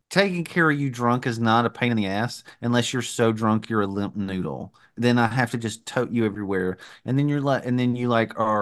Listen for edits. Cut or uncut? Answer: uncut